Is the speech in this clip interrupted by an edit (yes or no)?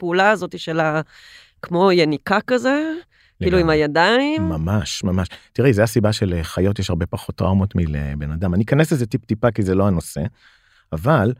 no